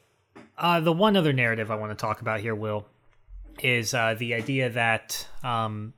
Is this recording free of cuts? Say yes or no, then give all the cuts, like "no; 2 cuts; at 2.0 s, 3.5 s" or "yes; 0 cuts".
yes; 0 cuts